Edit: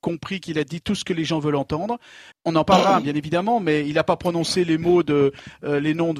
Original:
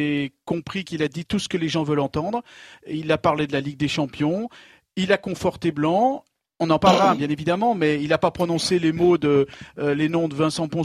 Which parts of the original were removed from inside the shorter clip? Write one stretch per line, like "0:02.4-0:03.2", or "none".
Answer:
0:02.8-0:06.5